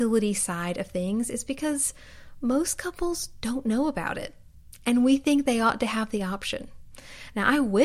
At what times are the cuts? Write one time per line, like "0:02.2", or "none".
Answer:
none